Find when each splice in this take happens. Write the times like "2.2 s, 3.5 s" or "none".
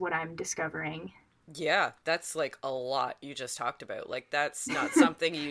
none

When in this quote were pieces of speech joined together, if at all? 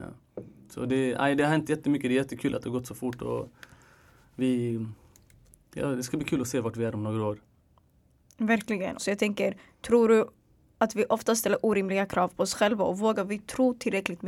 9.0 s

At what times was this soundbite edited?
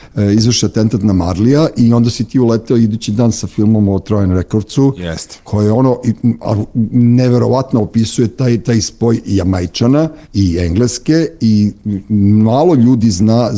10.2 s

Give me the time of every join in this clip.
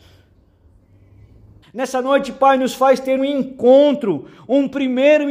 1.6 s, 3.2 s

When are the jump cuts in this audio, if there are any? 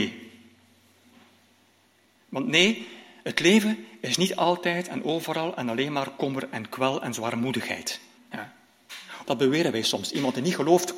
8.2 s, 9.2 s

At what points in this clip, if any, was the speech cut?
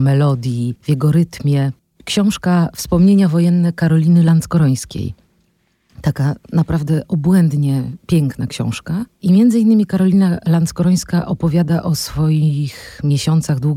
1.9 s, 9.1 s

